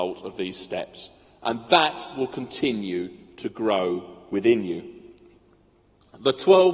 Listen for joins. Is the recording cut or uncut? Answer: uncut